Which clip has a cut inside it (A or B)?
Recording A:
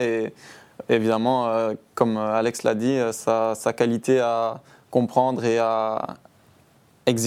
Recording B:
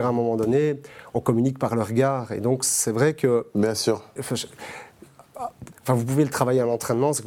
B